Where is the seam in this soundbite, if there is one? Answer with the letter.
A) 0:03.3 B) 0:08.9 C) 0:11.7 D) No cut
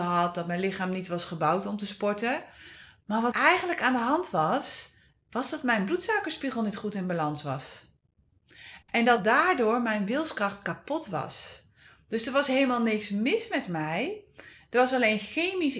A